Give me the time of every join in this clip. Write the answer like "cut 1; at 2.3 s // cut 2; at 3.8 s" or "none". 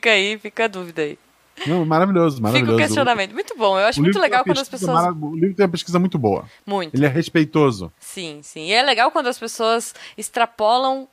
none